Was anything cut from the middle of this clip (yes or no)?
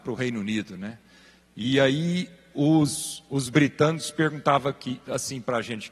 no